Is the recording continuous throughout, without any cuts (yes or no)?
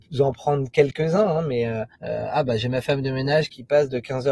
no